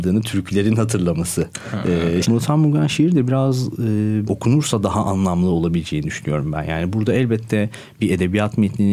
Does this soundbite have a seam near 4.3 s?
yes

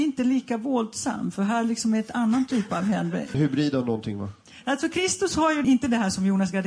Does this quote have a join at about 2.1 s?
no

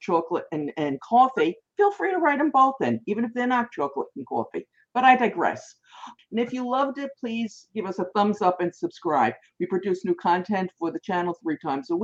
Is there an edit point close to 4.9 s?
no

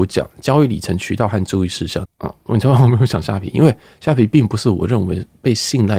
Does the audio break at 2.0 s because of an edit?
yes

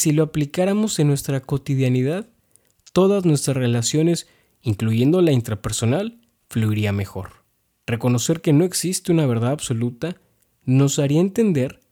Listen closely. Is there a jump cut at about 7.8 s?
yes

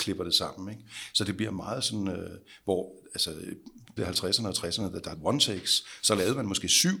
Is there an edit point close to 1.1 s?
no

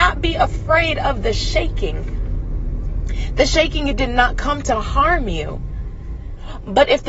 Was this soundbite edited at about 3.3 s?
no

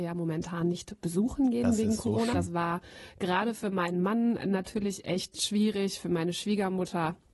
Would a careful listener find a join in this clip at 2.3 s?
yes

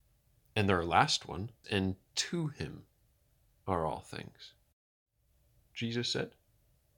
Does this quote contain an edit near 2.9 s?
no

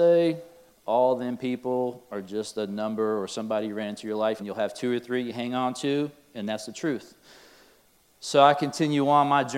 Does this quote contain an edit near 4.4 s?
yes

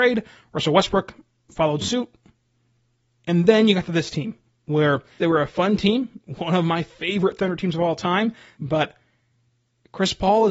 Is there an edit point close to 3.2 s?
no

